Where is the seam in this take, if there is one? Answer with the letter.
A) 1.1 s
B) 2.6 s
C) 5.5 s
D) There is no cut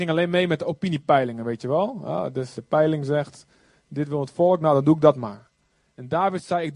B